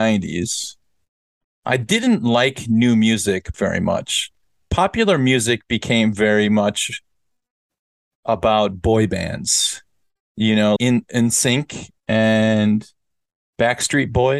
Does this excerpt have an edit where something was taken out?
yes; 3 cuts; at 3.5 s, 10.8 s, 12.0 s

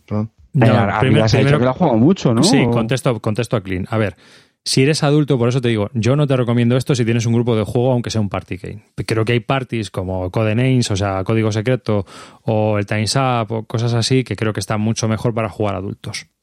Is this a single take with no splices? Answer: yes; 0 cuts

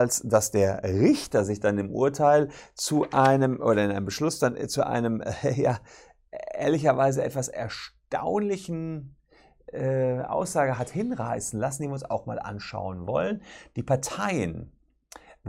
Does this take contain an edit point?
no; 0 cuts

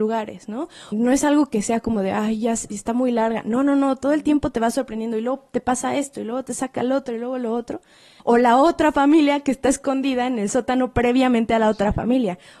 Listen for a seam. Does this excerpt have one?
yes; 2 cuts; at 0.9 s, 8.2 s

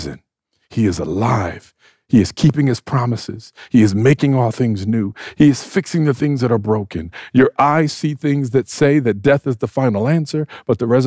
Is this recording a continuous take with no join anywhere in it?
yes; 0 cuts

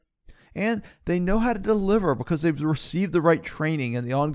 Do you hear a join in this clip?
no; 0 cuts

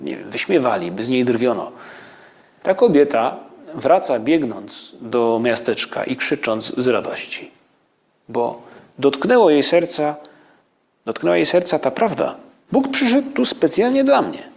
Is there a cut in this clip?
yes; 2 cuts; at 2.6 s, 12.7 s

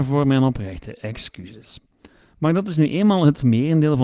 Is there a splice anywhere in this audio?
no; 0 cuts

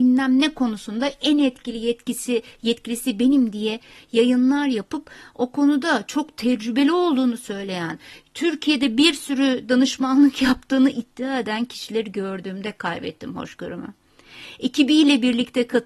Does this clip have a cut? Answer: no; 0 cuts

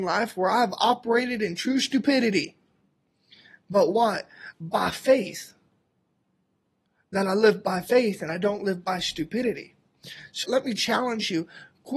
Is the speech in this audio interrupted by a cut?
yes; 2 cuts; at 4.5 s, 10.4 s

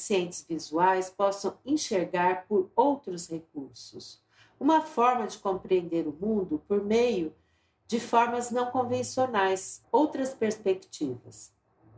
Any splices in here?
yes; 1 cut; at 9.8 s

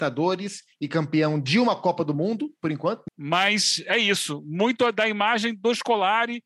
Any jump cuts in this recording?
yes; 1 cut; at 3.1 s

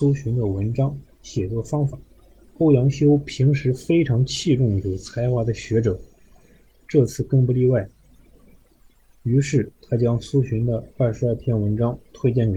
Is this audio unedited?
no; 1 cut; at 2.4 s

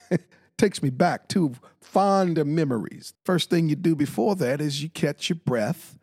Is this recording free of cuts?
no; 1 cut; at 3.2 s

